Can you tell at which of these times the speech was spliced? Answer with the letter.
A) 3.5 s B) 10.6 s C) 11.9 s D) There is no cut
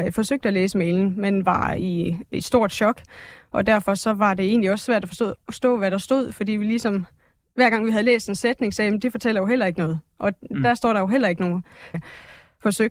C